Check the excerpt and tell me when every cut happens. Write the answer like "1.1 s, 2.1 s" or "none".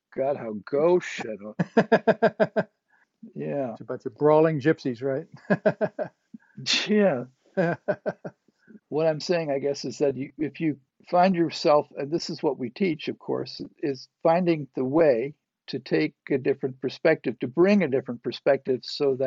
8.8 s